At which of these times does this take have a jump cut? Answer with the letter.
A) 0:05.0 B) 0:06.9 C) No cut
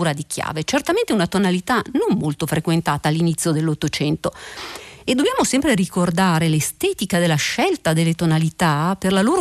C